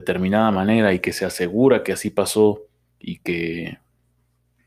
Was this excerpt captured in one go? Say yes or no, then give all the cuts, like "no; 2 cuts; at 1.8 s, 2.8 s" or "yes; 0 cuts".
yes; 0 cuts